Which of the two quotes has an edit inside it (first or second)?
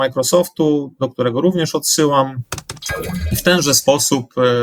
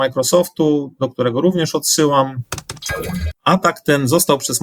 second